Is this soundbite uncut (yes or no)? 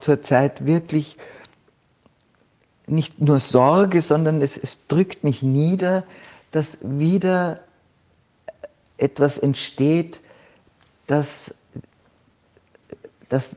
yes